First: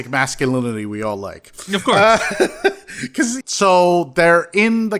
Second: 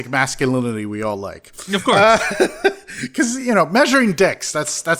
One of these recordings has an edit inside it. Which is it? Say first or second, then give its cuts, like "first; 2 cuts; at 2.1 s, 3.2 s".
first; 1 cut; at 3.4 s